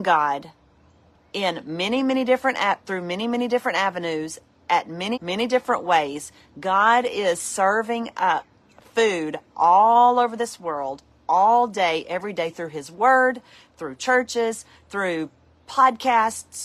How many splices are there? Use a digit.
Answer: 1